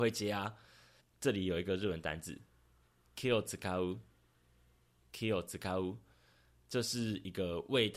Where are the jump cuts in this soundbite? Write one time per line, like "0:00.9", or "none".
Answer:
0:01.0